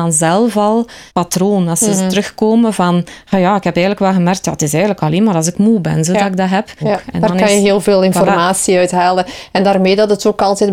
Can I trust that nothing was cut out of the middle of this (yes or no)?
no